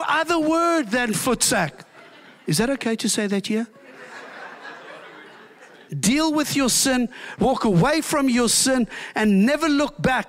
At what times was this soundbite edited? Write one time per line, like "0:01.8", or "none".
0:05.9
0:07.4